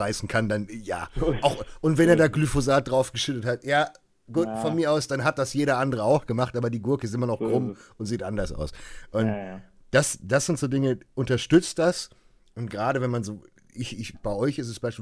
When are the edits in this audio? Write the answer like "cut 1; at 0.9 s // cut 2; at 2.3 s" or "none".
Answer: none